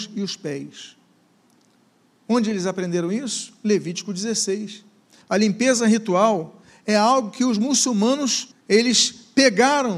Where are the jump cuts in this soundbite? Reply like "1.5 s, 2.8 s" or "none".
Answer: 5.2 s, 8.5 s